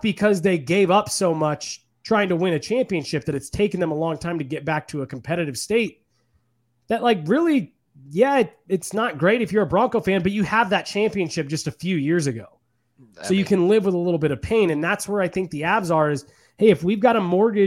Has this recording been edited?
no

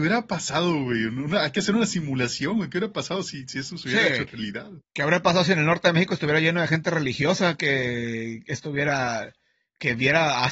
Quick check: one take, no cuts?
yes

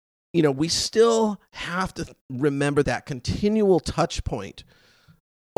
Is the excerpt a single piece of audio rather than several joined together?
no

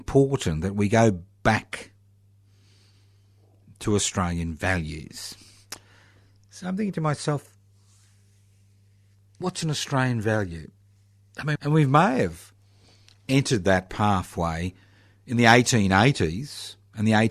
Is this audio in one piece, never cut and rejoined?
no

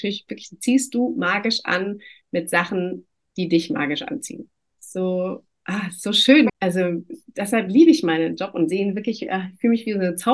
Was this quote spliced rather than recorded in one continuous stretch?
yes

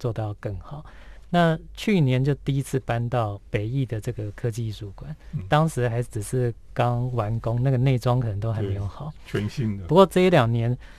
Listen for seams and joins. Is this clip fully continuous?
no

